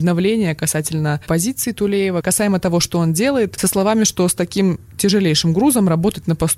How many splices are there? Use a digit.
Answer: 1